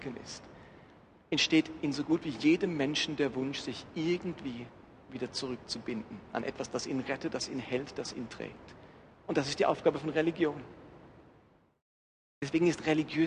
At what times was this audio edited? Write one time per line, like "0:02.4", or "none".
none